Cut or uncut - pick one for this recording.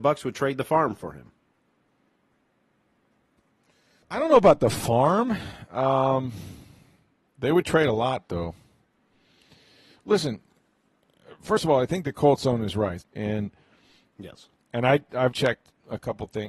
cut